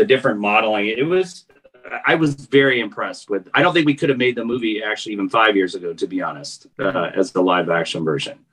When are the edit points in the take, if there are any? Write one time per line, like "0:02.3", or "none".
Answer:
none